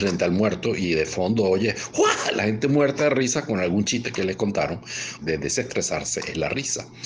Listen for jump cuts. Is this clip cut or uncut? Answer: cut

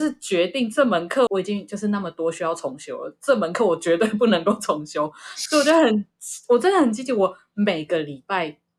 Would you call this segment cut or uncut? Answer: cut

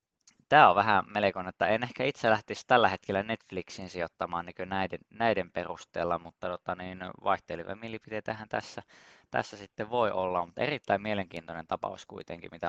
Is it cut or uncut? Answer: uncut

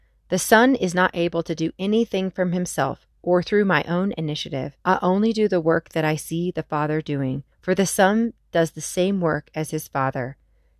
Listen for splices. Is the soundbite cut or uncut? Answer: cut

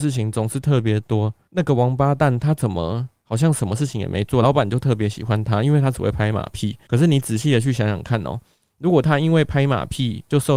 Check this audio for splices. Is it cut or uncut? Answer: uncut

